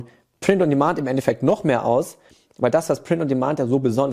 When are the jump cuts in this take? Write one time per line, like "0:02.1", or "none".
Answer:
none